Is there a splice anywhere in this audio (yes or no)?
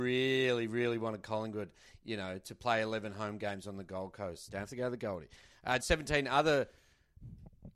yes